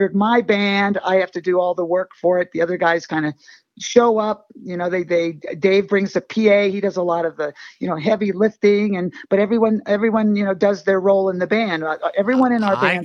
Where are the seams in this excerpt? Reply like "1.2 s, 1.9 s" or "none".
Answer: none